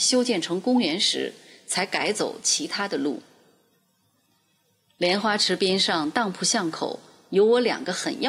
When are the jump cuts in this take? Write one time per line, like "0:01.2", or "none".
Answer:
none